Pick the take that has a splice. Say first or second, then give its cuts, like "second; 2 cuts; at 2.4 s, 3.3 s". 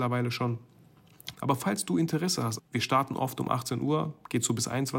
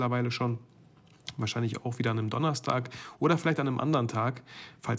first; 2 cuts; at 1.3 s, 2.6 s